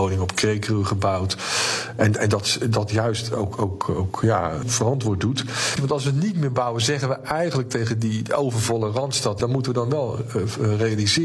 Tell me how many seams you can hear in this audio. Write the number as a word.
three